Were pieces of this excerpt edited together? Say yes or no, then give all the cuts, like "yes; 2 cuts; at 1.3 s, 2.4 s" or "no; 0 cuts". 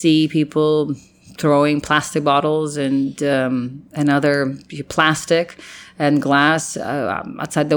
no; 0 cuts